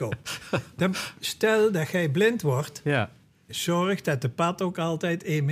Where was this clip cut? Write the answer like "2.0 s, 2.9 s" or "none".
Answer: 3.5 s